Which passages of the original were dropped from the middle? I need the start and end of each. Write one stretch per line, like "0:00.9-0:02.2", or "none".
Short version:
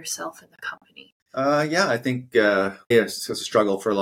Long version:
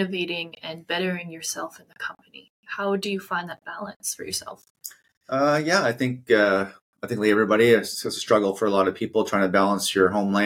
0:02.6-0:05.1
0:06.9-0:07.7